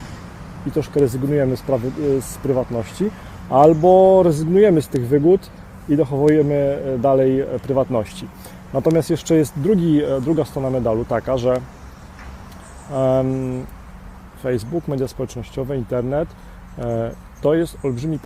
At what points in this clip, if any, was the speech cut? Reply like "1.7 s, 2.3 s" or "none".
none